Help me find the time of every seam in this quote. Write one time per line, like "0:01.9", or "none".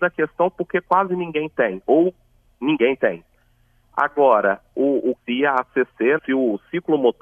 0:03.8
0:05.2
0:06.2